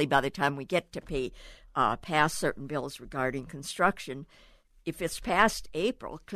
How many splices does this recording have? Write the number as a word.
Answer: zero